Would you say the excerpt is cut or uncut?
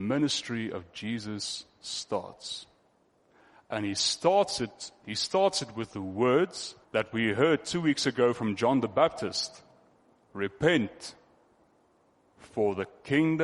cut